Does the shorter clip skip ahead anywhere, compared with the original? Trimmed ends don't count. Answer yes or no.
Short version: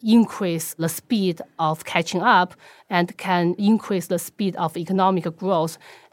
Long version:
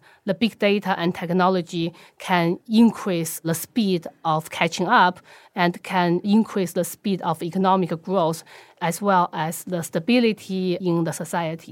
no